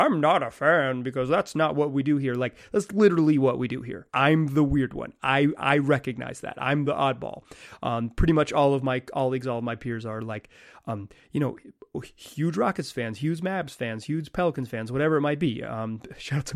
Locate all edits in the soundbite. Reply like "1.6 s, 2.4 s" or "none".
4.1 s

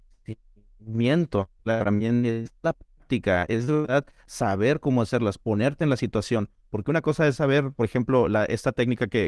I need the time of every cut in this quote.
1.6 s

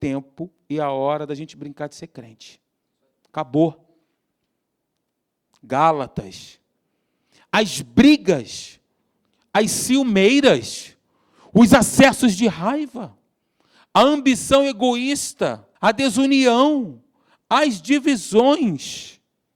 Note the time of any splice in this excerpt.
5.5 s, 15.8 s

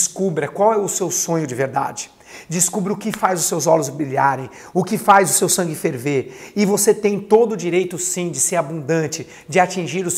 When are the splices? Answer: none

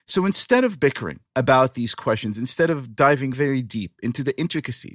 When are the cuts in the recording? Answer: 3.3 s

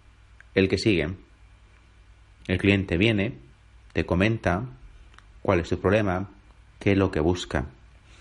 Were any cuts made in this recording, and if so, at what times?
2.4 s, 6.7 s

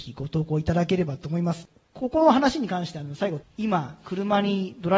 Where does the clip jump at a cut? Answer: 3.4 s

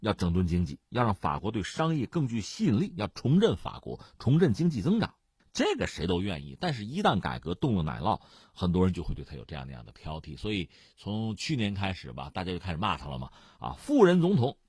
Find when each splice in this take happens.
none

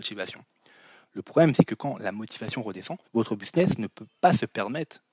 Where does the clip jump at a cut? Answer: 3.1 s

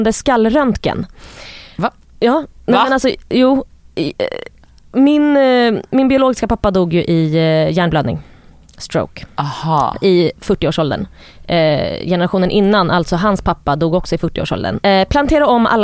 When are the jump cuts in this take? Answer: 14.8 s

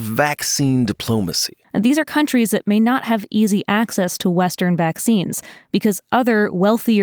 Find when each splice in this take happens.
1.6 s

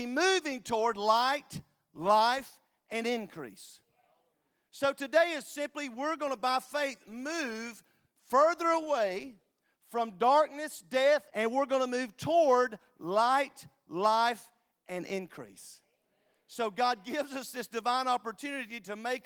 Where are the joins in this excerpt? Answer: 11.3 s

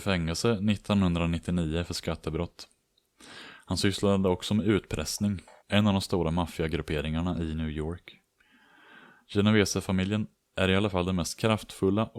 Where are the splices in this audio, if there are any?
5.6 s

